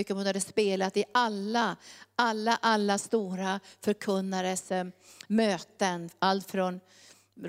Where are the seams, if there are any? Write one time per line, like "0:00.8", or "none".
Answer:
none